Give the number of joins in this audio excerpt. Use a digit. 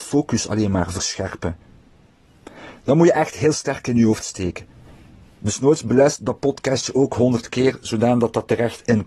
0